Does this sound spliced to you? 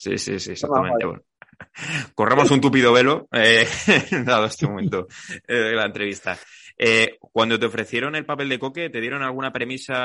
no; 0 cuts

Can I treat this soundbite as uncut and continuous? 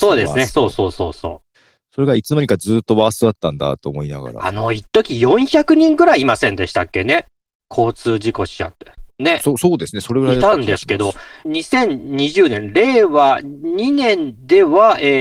no; 1 cut; at 11.4 s

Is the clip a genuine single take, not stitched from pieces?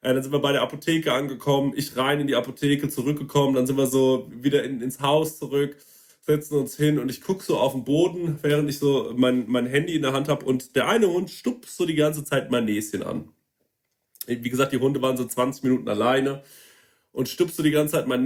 yes; 0 cuts

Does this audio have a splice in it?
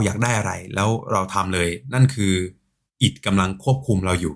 no; 0 cuts

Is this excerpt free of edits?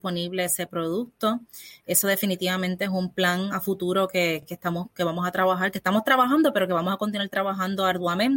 yes; 0 cuts

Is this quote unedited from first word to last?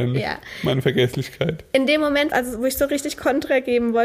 no; 1 cut; at 2.3 s

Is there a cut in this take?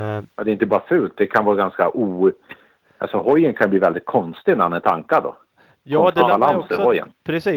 no; 0 cuts

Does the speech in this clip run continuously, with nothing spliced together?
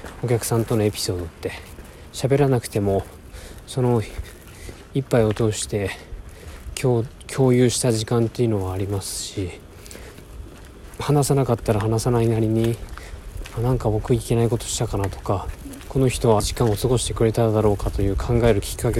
no; 1 cut; at 16.4 s

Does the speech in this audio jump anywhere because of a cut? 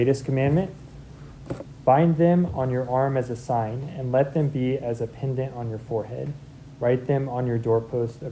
yes; 1 cut; at 1.8 s

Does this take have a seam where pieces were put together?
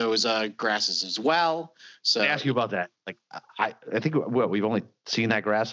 no; 0 cuts

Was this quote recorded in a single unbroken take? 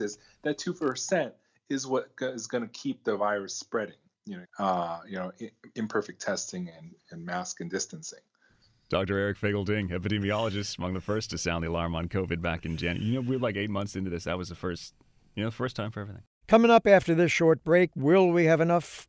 no; 1 cut; at 4.4 s

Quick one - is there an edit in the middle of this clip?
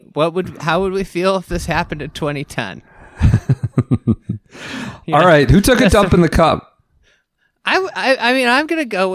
no; 0 cuts

